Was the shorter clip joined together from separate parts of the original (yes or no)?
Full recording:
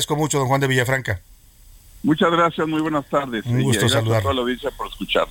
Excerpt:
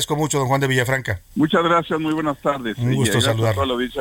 yes